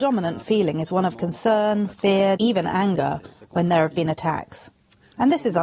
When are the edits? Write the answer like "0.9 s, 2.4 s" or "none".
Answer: 2.4 s

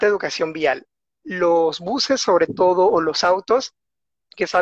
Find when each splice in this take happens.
none

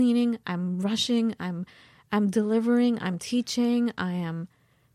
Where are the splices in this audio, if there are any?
none

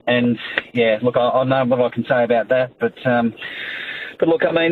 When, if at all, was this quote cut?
none

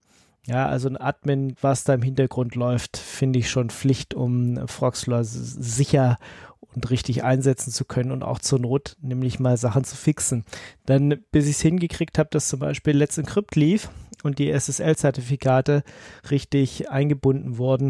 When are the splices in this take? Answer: 1.5 s

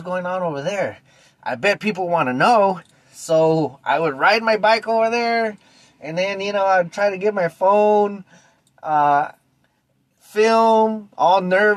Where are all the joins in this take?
none

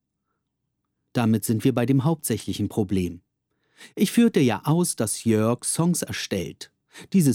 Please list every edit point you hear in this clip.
none

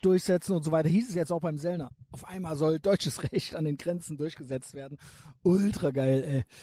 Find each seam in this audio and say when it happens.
none

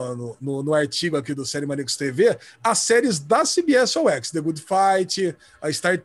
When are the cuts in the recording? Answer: none

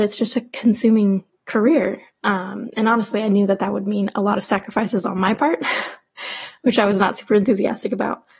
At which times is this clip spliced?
none

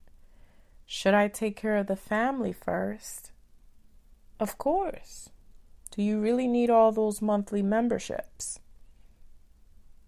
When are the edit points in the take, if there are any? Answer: 5.8 s

